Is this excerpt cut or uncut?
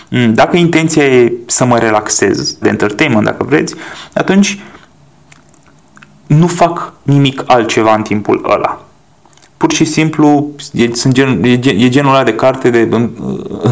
cut